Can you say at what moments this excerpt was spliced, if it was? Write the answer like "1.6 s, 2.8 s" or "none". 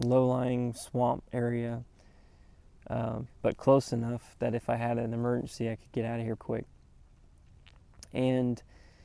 3.3 s, 6.4 s